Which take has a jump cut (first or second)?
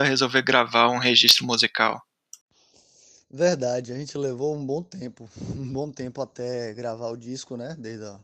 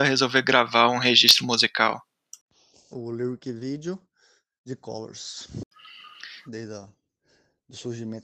second